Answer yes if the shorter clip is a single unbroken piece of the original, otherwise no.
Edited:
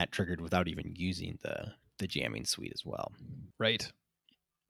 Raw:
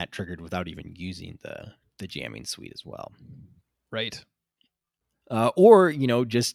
no